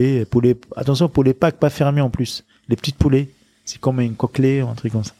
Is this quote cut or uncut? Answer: uncut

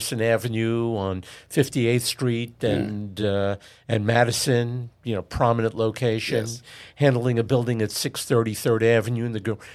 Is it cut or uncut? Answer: uncut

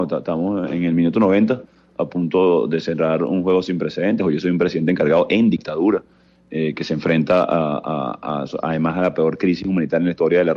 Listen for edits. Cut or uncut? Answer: uncut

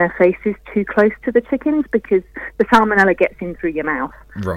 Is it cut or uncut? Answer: uncut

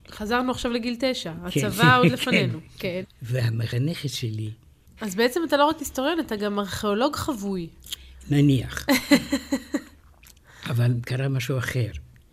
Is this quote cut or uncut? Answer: cut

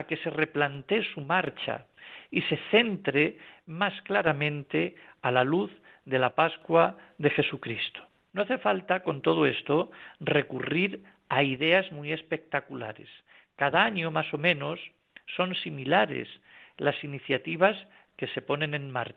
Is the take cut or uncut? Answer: uncut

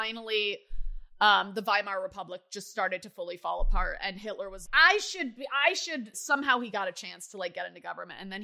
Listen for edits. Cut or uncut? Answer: cut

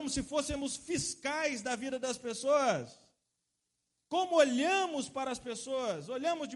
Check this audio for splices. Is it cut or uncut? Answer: uncut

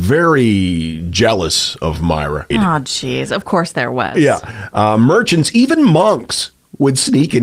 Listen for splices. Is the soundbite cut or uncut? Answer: cut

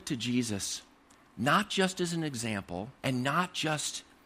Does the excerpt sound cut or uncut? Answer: cut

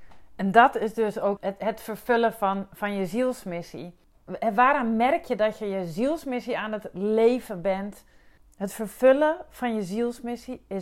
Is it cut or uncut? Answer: cut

